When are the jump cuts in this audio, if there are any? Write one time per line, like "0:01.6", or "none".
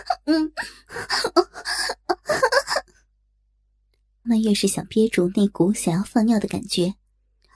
0:04.2